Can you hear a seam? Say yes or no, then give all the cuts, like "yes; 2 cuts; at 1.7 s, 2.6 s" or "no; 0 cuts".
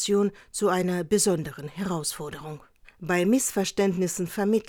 yes; 1 cut; at 2.8 s